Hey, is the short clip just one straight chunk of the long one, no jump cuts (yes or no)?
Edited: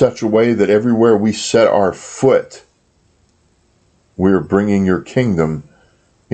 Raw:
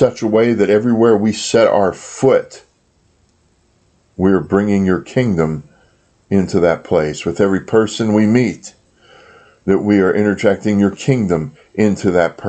yes